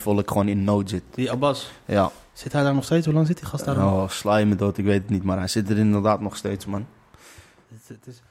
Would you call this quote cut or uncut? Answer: uncut